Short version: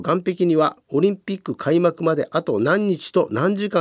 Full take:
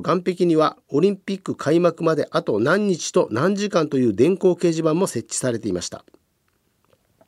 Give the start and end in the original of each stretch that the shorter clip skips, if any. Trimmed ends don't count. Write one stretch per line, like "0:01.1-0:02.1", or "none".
none